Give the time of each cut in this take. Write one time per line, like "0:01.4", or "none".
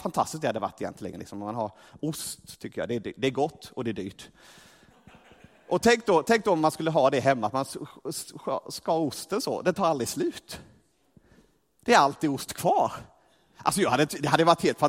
none